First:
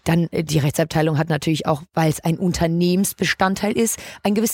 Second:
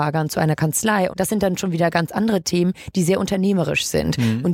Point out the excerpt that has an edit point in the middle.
second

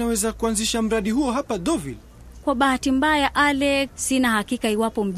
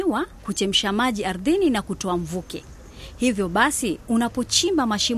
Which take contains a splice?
first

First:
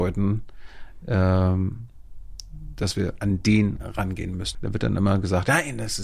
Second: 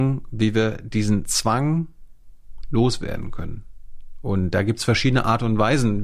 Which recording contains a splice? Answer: first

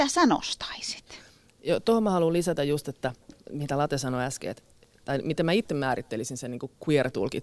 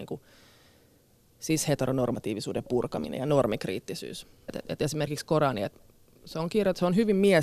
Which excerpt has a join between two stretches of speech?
second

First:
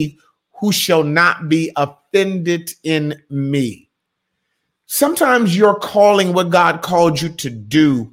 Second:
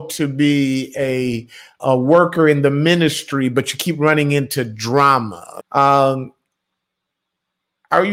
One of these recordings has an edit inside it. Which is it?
second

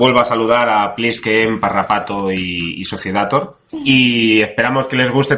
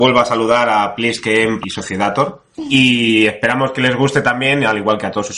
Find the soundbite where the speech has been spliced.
second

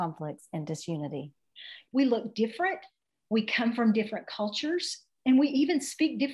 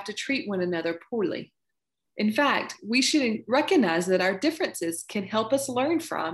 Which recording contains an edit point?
first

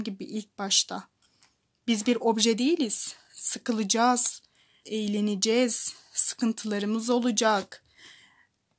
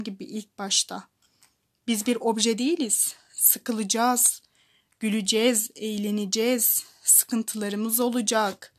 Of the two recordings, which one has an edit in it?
first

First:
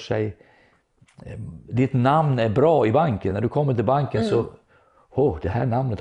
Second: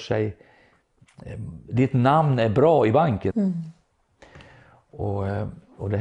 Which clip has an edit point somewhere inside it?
second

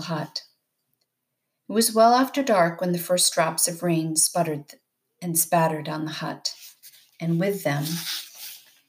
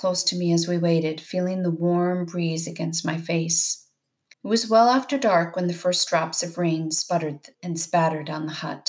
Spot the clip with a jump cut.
second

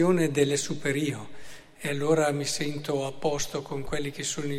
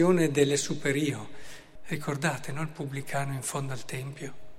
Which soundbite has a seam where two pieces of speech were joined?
second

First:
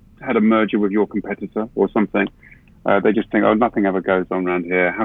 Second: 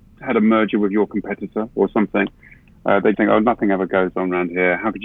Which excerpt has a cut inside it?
second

